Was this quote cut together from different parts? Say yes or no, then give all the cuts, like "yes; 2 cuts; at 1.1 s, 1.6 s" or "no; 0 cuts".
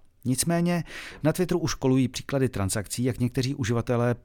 no; 0 cuts